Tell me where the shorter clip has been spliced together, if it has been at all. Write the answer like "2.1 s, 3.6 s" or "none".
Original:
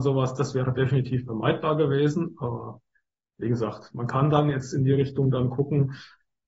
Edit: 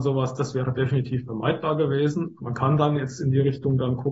2.4 s